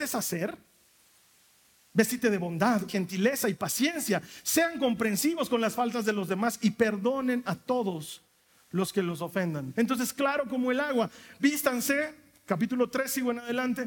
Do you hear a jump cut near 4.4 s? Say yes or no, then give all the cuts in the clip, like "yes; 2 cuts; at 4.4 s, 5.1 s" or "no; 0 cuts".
no; 3 cuts; at 2.9 s, 9.7 s, 11.4 s